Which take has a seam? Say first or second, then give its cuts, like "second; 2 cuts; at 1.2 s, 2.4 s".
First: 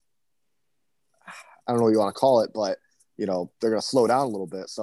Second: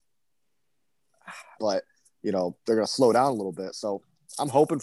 second; 1 cut; at 1.6 s